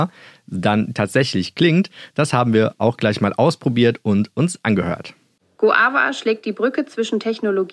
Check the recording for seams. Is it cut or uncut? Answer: cut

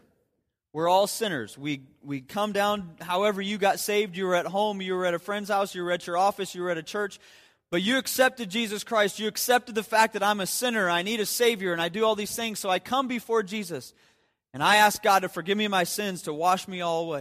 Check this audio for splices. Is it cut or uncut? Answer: uncut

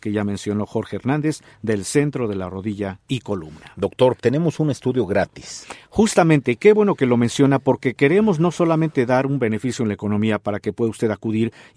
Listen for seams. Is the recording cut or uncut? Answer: cut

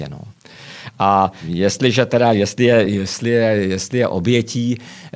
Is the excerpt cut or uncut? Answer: uncut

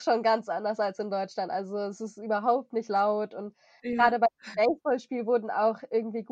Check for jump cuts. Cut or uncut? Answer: uncut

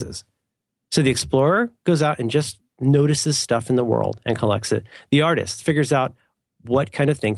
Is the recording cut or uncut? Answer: uncut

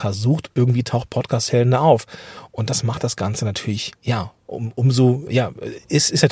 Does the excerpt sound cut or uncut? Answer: cut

